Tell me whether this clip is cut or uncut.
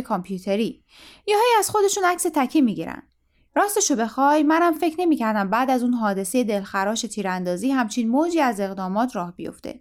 uncut